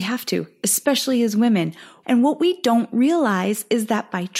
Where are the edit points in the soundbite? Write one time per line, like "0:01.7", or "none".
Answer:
0:02.0